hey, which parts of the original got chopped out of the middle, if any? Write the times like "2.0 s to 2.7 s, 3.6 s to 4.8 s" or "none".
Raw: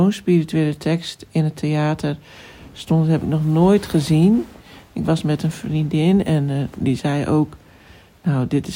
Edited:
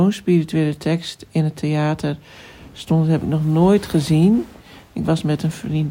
none